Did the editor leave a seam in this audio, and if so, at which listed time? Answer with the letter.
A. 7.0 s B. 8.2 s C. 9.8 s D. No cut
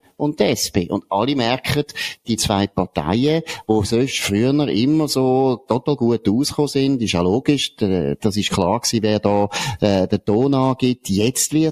B